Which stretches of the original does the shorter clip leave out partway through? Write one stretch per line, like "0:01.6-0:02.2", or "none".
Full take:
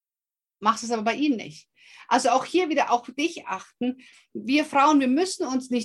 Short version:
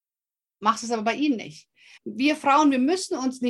0:02.0-0:04.3